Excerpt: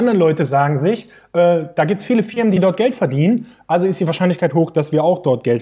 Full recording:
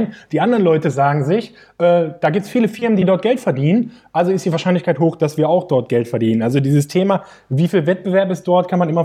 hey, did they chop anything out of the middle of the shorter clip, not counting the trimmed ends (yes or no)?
no